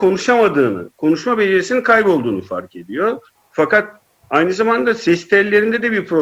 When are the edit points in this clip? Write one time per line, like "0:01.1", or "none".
none